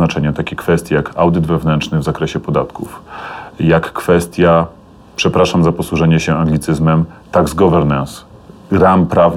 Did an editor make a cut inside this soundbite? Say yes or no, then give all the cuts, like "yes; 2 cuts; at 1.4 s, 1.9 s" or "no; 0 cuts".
no; 0 cuts